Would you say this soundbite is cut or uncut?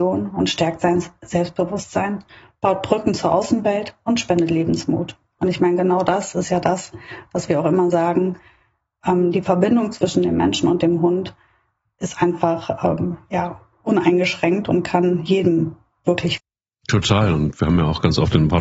uncut